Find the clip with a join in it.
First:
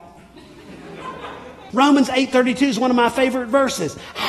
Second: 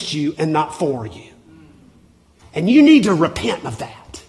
first; 1 cut; at 1.7 s

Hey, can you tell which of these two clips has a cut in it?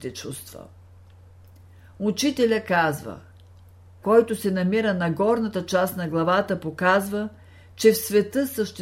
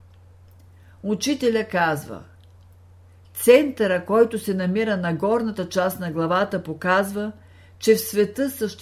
first; 1 cut; at 4.0 s

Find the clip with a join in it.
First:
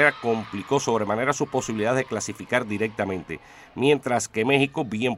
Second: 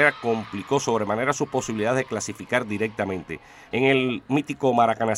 second; 1 cut; at 3.7 s

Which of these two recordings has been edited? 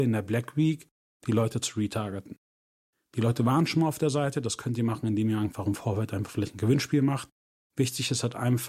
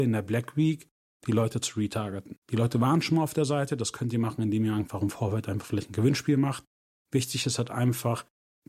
second; 1 cut; at 2.4 s

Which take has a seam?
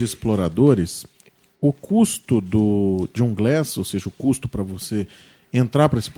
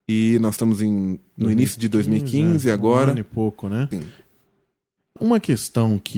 second; 2 cuts; at 3.9 s, 5.2 s

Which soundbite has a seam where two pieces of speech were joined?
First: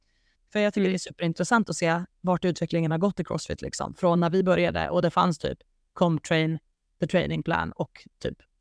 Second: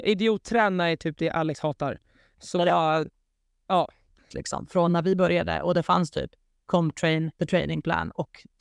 second; 2 cuts; at 4.3 s, 7.3 s

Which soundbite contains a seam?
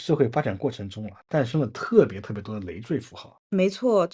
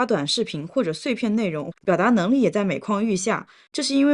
second; 1 cut; at 1.7 s

